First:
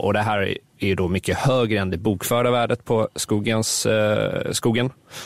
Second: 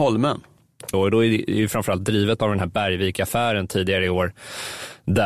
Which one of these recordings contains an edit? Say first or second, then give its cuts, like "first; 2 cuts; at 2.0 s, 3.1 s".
second; 1 cut; at 0.9 s